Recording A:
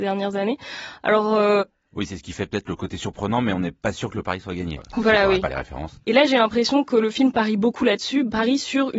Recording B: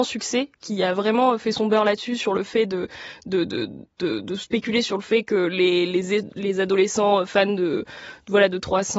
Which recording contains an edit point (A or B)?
A